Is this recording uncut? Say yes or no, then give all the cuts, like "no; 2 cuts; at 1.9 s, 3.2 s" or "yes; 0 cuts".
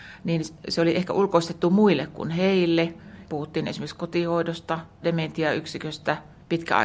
no; 2 cuts; at 3.2 s, 5.0 s